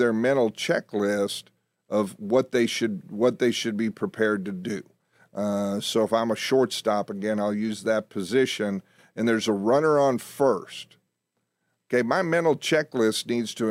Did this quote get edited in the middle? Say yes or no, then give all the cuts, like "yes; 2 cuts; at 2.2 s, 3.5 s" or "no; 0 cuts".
no; 0 cuts